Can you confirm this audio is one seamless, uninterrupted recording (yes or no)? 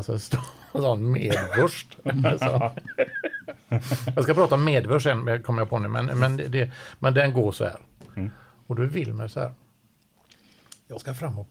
yes